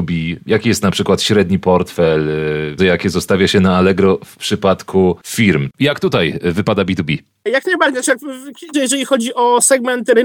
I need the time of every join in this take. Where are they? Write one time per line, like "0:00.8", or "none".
0:02.8
0:08.7